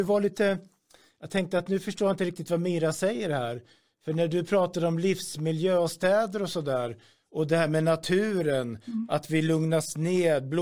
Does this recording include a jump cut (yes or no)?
no